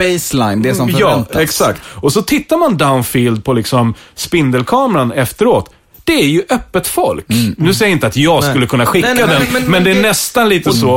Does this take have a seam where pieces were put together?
yes; 1 cut; at 1.8 s

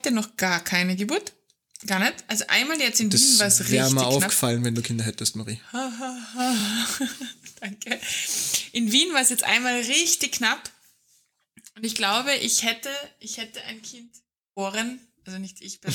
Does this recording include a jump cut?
no; 0 cuts

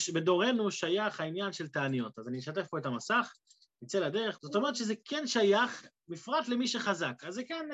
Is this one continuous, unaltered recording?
no; 1 cut; at 4.4 s

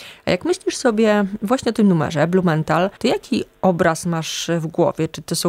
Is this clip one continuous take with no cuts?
no; 1 cut; at 3.0 s

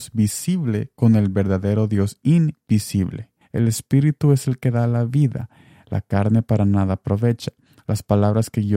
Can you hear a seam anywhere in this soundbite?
yes; 1 cut; at 3.4 s

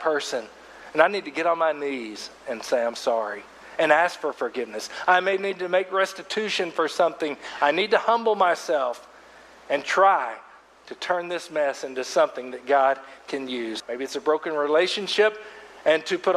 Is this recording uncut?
no; 1 cut; at 13.8 s

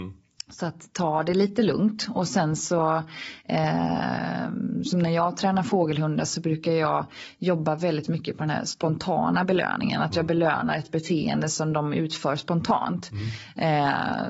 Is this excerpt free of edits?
yes; 0 cuts

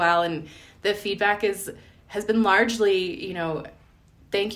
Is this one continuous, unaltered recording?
yes; 0 cuts

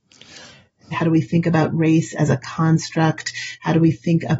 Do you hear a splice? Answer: yes; 1 cut; at 0.9 s

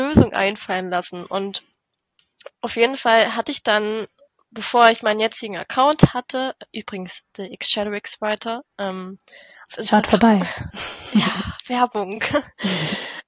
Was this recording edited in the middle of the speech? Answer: no; 0 cuts

